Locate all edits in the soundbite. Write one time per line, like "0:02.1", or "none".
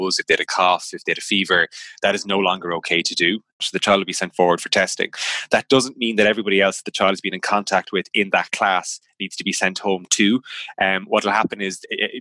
0:03.6